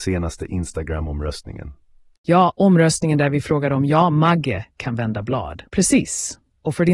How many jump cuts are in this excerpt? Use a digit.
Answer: 1